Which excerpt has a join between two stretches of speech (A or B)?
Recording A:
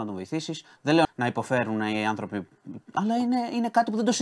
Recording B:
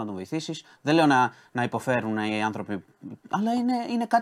A